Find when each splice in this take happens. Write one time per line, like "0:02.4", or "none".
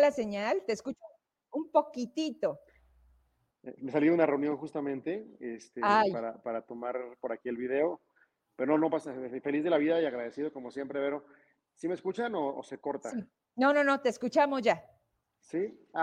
0:03.5

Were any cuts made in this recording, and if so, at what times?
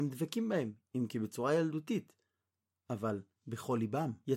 none

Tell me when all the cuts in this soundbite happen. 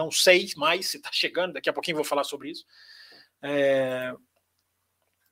none

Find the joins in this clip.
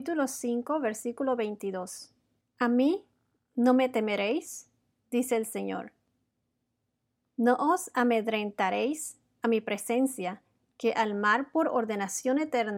0:02.4

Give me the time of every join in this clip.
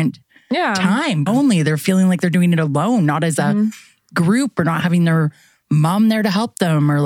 0:01.3

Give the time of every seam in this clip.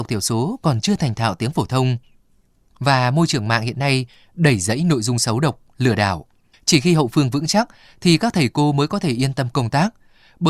0:02.7
0:06.5

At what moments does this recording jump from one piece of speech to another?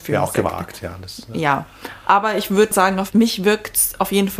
0:02.7

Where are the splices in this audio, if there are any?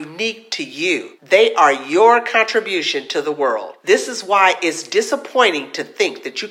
none

